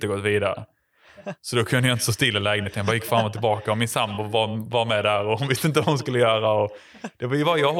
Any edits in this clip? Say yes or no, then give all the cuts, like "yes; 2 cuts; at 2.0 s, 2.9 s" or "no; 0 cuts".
no; 0 cuts